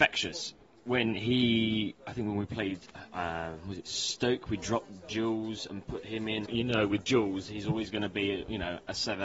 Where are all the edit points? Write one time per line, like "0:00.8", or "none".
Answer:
0:06.5